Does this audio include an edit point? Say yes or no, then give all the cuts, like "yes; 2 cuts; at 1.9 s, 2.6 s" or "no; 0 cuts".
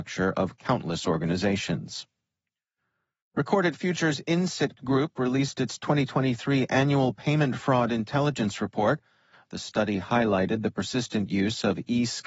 no; 0 cuts